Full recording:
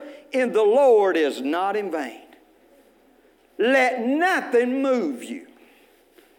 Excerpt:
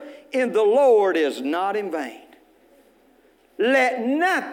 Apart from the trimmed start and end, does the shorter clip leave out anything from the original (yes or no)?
no